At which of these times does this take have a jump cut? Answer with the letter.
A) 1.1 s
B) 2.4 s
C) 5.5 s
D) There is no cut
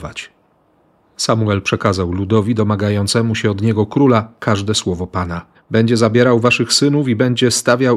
C